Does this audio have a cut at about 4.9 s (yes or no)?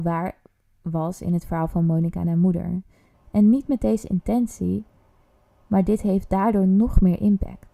no